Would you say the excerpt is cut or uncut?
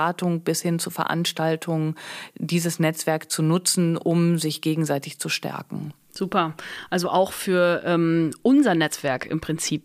uncut